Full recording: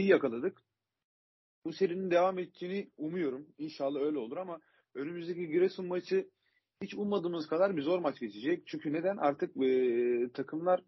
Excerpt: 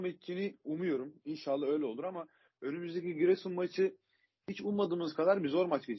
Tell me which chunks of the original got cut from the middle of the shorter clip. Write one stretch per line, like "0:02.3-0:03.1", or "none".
none